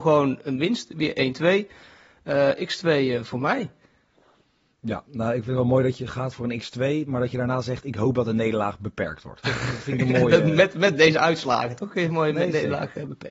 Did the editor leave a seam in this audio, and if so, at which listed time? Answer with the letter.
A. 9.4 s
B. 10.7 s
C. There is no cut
A